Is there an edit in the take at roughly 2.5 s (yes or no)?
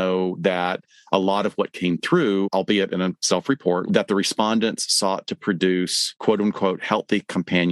no